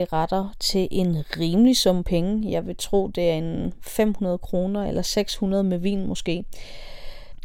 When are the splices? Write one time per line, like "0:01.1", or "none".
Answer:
none